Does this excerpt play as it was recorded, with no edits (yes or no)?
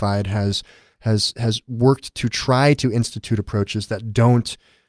yes